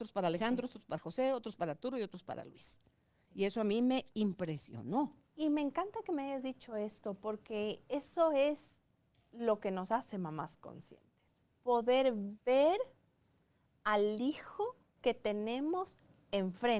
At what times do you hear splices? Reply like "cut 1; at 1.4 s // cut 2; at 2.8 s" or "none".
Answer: cut 1; at 5.3 s